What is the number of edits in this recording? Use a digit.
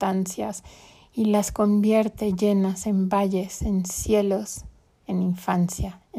1